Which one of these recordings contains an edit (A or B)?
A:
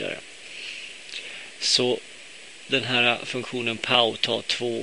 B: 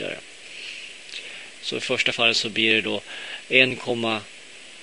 B